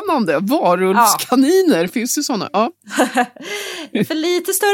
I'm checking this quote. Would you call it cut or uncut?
uncut